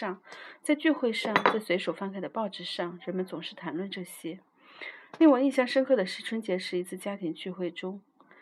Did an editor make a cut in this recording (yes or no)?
no